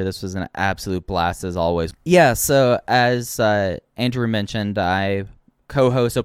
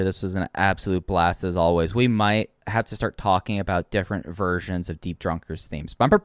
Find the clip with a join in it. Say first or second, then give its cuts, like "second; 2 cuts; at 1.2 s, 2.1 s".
first; 1 cut; at 1.9 s